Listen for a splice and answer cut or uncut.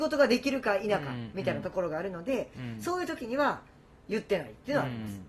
uncut